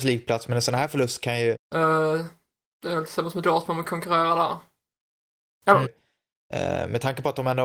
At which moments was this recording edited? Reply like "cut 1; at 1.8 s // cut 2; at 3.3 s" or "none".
cut 1; at 1.5 s // cut 2; at 5.8 s